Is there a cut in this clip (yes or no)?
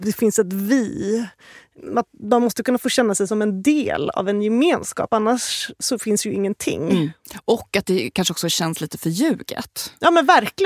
no